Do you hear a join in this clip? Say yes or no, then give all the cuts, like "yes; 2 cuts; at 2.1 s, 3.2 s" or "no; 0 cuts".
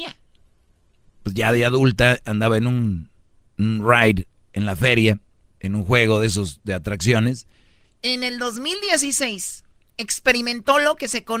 yes; 2 cuts; at 1.0 s, 7.8 s